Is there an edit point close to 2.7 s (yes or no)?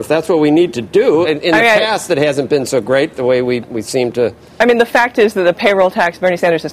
no